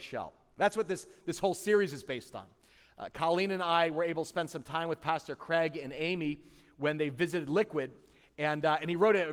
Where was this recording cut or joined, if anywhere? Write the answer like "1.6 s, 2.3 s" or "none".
none